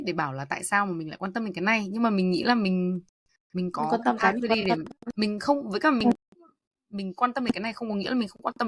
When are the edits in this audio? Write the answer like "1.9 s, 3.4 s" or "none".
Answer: none